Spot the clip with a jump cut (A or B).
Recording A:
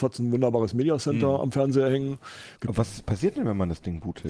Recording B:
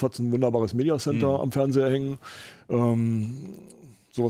A